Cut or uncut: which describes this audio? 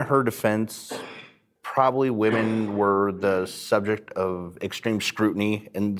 uncut